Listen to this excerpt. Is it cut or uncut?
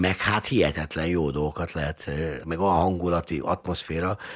cut